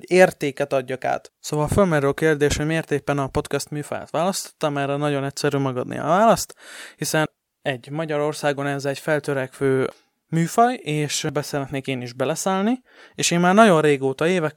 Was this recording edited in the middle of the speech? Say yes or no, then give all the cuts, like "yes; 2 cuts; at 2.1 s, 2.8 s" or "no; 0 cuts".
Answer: no; 0 cuts